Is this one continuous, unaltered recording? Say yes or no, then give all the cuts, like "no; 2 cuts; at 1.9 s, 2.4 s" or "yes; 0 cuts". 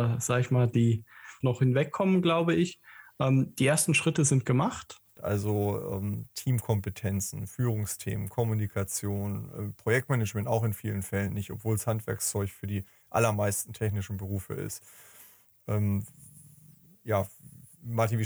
no; 2 cuts; at 1.4 s, 5.2 s